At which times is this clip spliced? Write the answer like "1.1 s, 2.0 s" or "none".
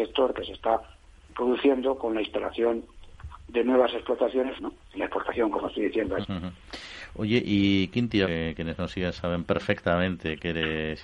4.6 s, 6.2 s, 8.2 s